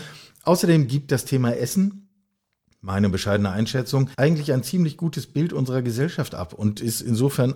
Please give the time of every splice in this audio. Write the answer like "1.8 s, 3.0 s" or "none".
4.1 s